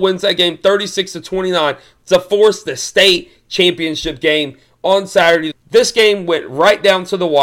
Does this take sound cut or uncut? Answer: cut